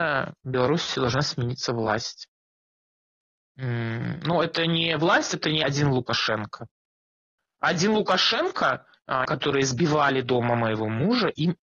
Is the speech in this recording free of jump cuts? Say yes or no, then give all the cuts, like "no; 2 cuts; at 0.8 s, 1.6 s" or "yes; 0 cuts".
no; 1 cut; at 9.3 s